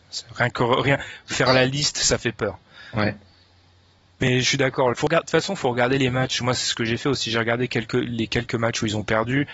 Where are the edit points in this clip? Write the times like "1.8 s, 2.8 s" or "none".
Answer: 4.9 s